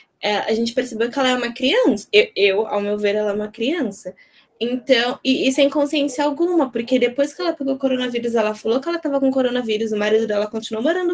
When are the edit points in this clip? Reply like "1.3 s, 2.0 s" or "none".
4.5 s